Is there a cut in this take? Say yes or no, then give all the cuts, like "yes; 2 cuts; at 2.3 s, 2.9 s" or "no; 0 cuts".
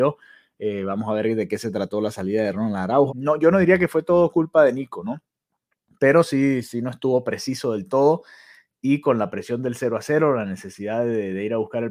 yes; 1 cut; at 3.1 s